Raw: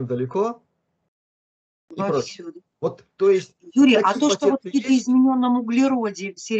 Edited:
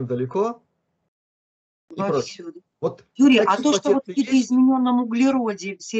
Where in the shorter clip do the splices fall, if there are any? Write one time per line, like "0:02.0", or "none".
0:03.2